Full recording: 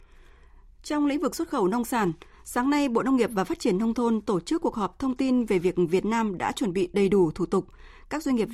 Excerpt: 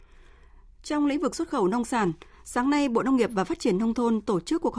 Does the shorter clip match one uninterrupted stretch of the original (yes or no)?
yes